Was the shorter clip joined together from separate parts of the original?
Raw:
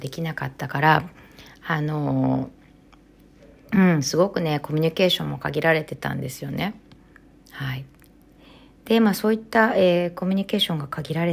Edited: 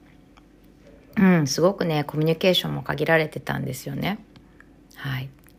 no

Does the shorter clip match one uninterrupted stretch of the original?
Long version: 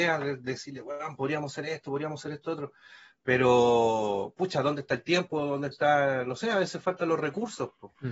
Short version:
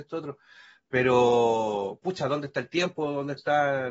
yes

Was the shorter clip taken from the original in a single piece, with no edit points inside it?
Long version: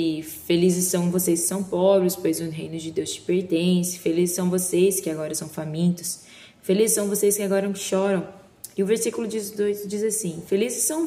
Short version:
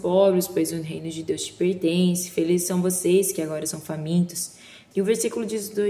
no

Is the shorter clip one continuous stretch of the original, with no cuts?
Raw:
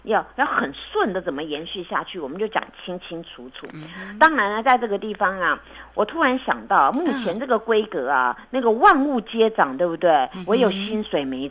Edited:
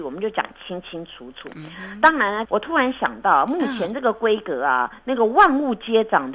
no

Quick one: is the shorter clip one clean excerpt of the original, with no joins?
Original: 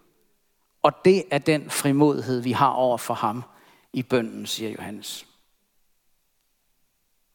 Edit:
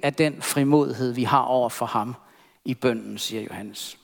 yes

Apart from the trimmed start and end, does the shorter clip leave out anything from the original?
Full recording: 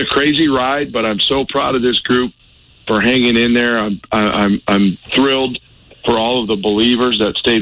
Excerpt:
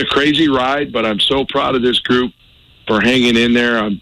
no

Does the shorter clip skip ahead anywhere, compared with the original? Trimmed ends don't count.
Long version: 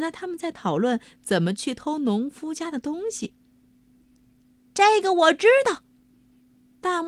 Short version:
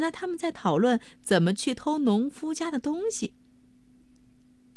no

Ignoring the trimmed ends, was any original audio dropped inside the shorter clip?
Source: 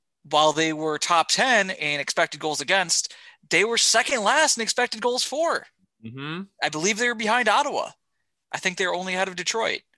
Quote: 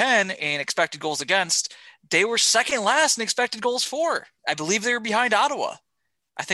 yes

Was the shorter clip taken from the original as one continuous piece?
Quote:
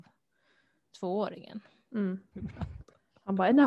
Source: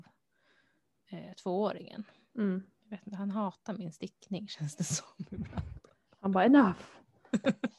no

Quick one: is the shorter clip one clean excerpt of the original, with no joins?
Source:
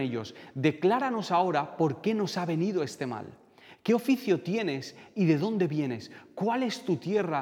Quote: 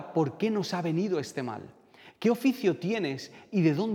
yes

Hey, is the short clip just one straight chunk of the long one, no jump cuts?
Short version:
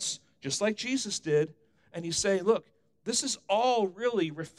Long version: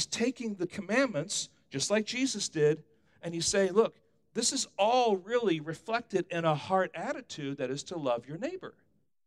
yes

